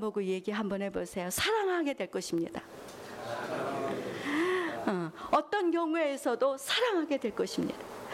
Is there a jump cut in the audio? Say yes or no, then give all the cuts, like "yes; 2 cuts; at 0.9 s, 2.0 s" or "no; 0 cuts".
no; 0 cuts